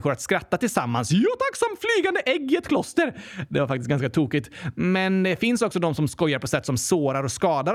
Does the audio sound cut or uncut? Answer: uncut